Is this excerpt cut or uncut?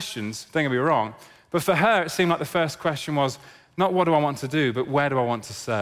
uncut